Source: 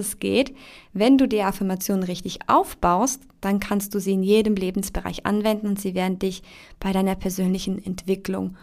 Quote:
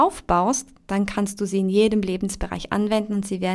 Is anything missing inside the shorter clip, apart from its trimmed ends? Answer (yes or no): no